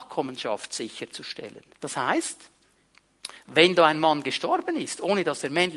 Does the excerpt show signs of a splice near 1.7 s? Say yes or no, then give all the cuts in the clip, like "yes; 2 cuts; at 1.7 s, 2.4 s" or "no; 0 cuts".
yes; 1 cut; at 1.7 s